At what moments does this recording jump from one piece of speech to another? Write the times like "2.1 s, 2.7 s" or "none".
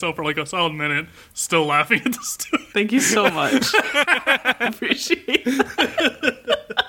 2.7 s, 4.7 s

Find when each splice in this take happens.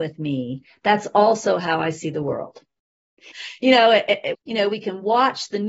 3.3 s, 4.3 s

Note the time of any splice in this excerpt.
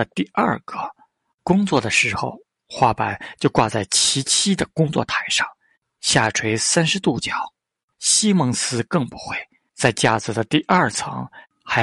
7.9 s, 9.7 s

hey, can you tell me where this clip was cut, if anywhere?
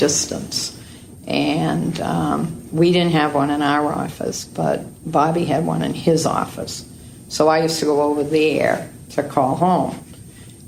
none

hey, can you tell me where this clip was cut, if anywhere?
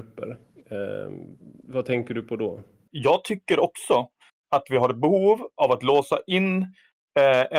2.9 s

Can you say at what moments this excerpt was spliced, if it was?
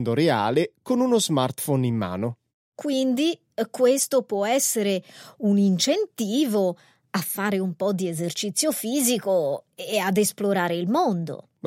none

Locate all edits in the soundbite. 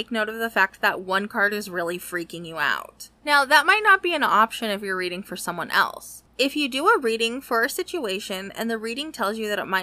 3.2 s, 6.3 s

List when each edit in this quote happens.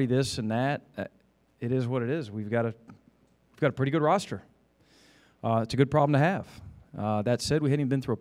none

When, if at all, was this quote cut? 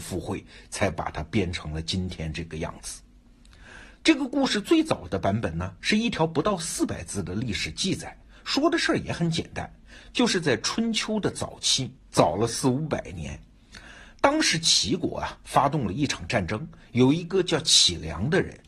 12.1 s

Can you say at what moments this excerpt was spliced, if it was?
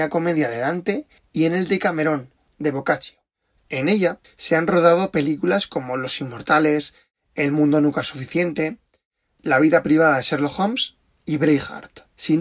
3.7 s

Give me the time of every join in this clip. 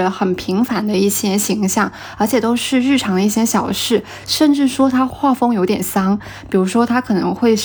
none

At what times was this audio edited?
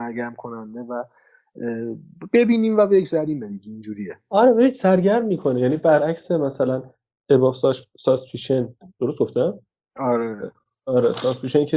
none

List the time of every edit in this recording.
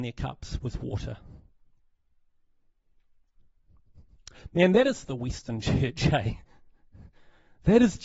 none

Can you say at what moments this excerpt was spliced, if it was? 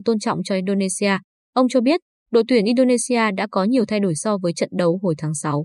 none

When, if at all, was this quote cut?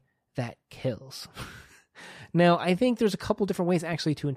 none

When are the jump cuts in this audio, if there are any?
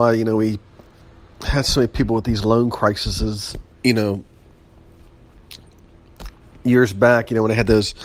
3.7 s

